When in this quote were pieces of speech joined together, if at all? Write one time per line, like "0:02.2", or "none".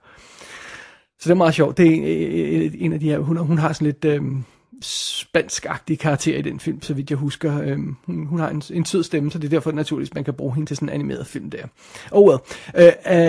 0:04.8